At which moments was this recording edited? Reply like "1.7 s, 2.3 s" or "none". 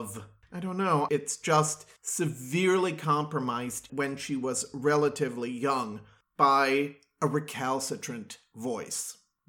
1.1 s, 3.9 s